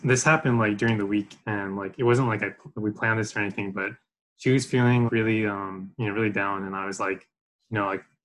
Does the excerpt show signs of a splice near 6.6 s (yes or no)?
no